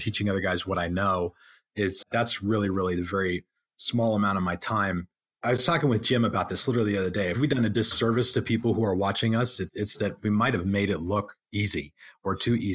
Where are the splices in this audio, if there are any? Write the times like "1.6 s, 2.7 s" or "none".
2.0 s